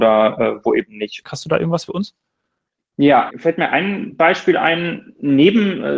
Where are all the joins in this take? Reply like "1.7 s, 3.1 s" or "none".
1.2 s, 3.3 s